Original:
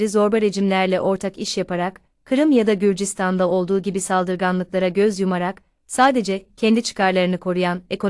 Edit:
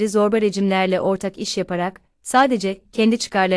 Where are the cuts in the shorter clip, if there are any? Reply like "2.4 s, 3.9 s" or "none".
2.1 s